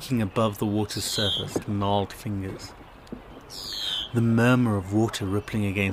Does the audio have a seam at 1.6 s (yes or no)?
yes